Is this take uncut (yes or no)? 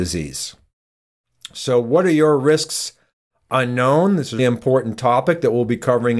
no